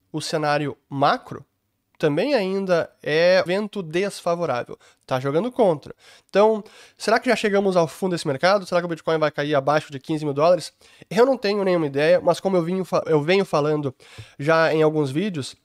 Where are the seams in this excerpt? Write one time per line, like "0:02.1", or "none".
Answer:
0:03.5
0:13.0